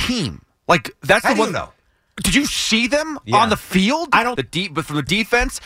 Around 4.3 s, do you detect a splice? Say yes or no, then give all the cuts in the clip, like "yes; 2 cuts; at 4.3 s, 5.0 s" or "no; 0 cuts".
yes; 1 cut; at 4.3 s